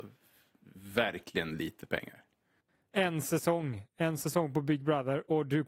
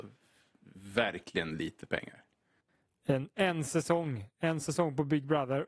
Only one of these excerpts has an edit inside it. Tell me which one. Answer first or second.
first